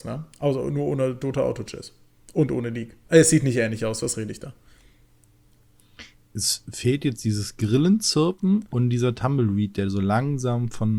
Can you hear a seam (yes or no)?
no